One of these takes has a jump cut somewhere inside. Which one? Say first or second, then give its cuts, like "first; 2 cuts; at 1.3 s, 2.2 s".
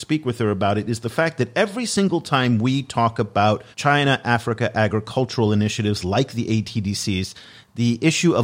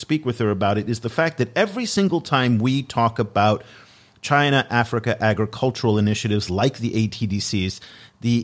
first; 1 cut; at 3.7 s